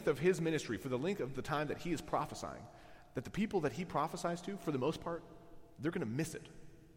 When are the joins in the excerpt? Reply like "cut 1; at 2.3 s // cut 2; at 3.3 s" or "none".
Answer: none